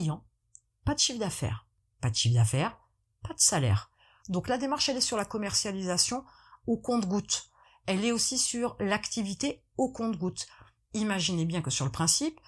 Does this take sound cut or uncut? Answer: cut